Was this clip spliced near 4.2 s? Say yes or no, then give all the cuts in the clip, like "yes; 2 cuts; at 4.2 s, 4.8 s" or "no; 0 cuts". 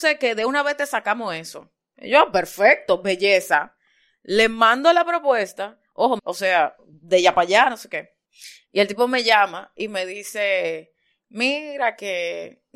no; 1 cut; at 6.2 s